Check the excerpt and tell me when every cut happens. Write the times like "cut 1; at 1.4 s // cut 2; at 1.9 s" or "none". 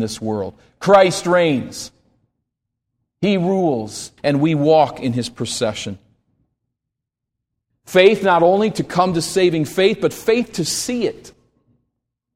cut 1; at 4.2 s // cut 2; at 7.7 s